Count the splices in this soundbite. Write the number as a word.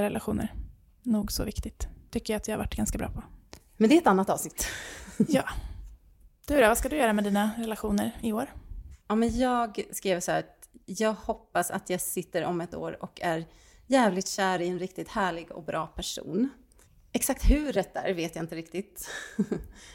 one